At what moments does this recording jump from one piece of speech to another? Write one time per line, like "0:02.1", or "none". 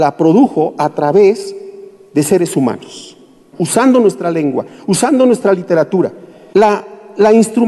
0:03.5
0:06.5